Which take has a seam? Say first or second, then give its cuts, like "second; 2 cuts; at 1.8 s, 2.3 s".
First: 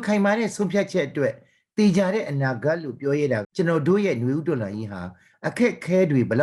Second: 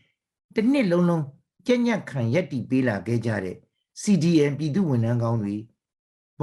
first; 1 cut; at 3.4 s